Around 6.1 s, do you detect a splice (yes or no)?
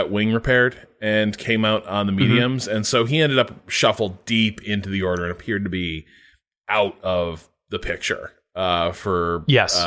no